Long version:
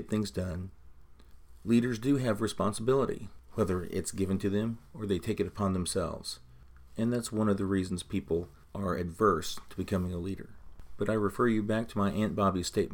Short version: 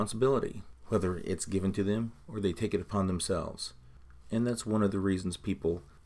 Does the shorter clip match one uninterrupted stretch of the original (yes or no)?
yes